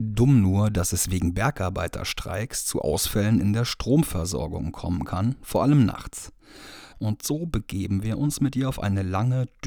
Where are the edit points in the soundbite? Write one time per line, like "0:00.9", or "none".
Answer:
0:06.9